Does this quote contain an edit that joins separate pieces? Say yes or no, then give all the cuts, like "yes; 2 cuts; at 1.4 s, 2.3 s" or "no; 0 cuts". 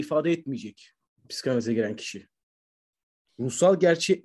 yes; 1 cut; at 3.3 s